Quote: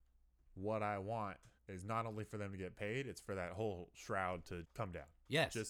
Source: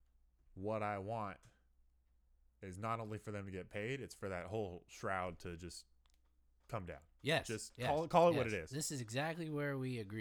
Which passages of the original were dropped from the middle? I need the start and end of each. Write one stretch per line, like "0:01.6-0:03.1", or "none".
0:01.6-0:02.5
0:05.6-0:06.6

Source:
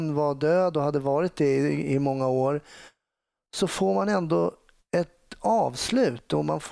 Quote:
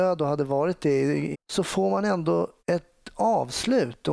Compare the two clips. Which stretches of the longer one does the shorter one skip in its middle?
0:01.9-0:03.4
0:04.6-0:04.8

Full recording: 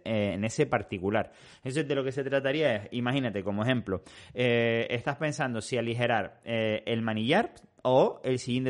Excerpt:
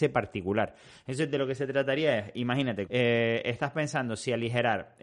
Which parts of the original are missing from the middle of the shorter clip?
0:03.4-0:04.3

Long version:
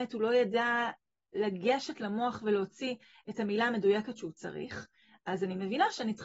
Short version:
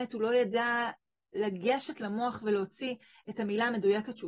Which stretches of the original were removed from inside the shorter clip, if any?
none

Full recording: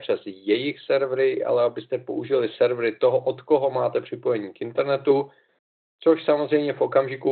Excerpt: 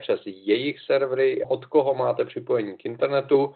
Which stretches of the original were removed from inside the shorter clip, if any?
0:01.4-0:03.2

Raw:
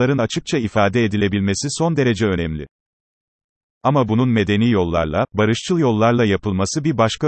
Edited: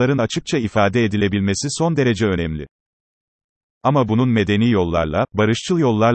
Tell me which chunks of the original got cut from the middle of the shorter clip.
none

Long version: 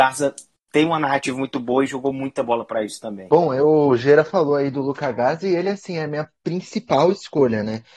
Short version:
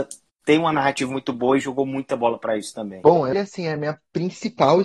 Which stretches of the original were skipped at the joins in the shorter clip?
0:03.6-0:05.6

